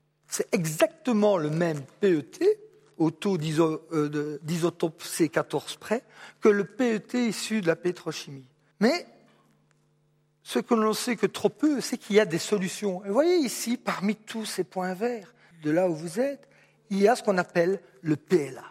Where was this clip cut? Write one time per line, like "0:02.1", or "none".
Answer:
0:08.7
0:15.5